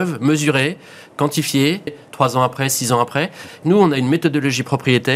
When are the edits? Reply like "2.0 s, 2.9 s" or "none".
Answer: 1.9 s, 3.6 s